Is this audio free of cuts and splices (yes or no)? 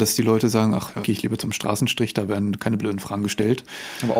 no